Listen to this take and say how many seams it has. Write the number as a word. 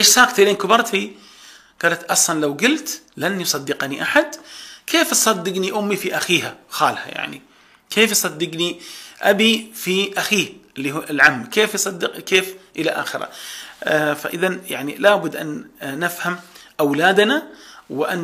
zero